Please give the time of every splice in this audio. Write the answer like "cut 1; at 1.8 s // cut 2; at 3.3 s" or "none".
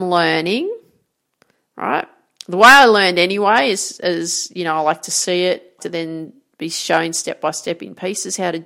cut 1; at 5.8 s